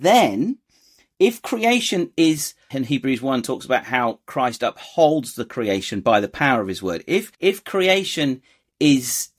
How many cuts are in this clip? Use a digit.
2